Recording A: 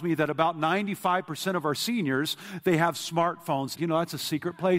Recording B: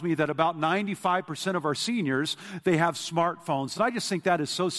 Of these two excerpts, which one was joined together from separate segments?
A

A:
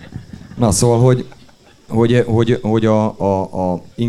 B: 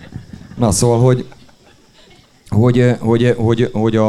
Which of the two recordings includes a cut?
A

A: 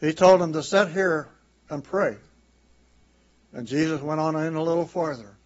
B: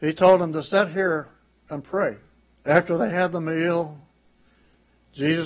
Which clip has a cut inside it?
B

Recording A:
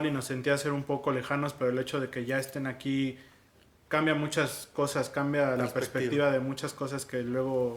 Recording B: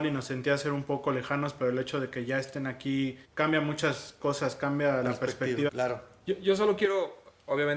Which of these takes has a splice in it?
B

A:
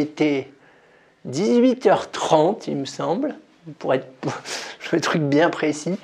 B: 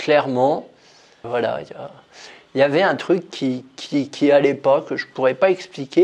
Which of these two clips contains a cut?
B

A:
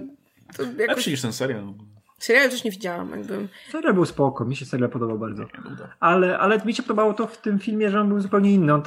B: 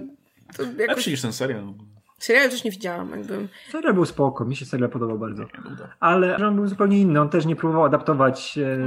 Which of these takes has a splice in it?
B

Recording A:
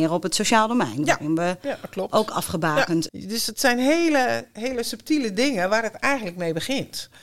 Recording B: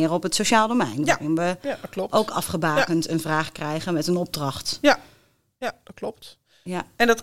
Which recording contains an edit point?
A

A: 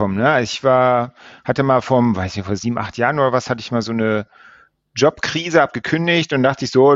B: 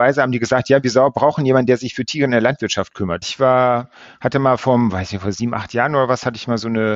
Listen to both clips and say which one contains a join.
B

